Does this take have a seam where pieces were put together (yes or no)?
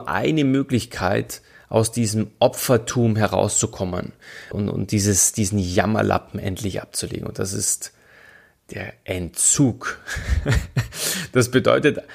yes